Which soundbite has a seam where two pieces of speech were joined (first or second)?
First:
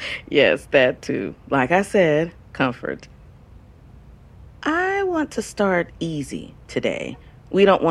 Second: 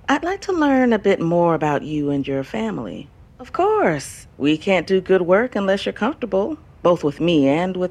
second